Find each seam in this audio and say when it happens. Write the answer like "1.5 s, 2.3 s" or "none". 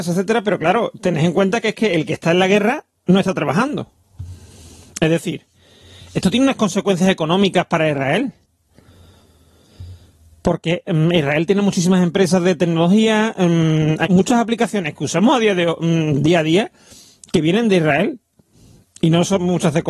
14.1 s